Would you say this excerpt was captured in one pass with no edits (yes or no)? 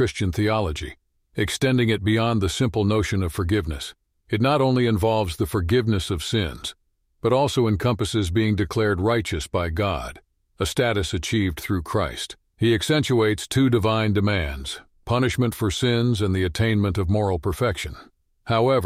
no